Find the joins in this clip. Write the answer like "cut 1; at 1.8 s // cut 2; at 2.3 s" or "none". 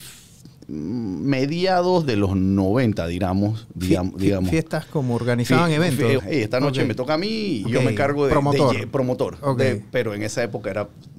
cut 1; at 6.2 s // cut 2; at 7.6 s